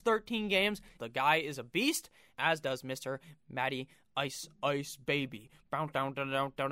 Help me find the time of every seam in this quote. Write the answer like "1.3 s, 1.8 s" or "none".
1.0 s, 2.3 s